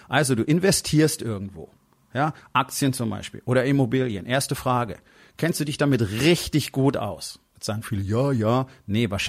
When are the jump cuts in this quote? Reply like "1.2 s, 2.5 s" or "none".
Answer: none